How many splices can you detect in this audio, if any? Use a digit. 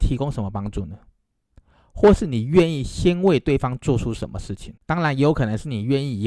1